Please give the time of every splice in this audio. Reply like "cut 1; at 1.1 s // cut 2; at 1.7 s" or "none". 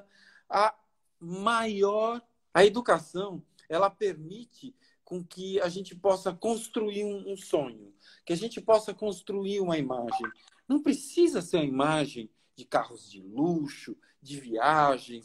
cut 1; at 2.5 s